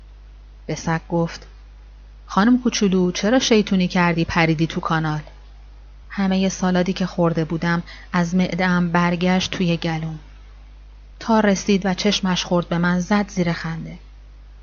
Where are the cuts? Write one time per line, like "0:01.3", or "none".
0:06.0
0:11.1

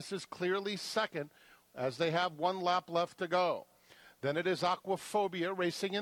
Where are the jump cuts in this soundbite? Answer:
none

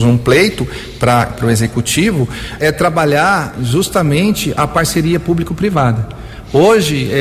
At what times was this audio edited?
0:02.6

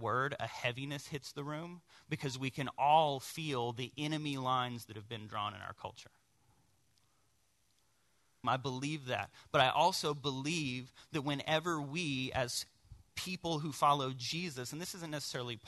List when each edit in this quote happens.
0:08.4

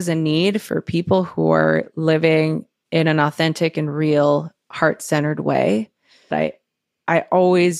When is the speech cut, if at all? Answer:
0:06.3

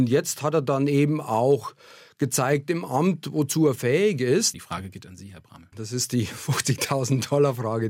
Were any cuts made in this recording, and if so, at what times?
0:04.5
0:05.7

